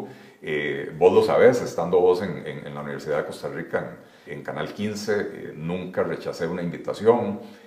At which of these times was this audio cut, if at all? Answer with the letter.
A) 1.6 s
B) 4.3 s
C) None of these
B